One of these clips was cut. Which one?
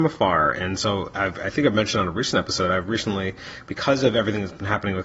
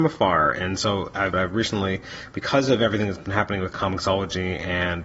second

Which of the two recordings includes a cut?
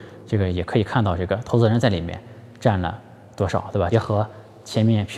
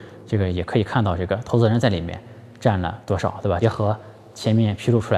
second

